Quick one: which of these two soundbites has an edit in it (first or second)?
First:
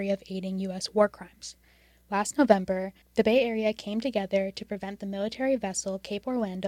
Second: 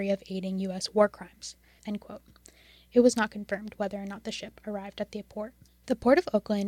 second